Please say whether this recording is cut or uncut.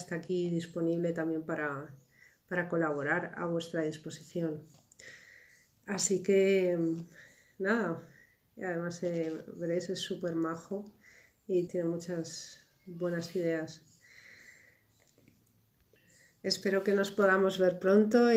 cut